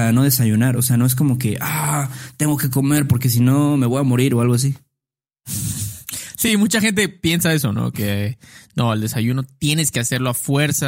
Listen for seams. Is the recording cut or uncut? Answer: uncut